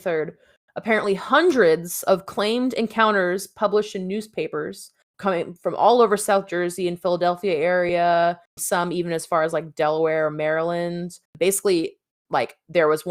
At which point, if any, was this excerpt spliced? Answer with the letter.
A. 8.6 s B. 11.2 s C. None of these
A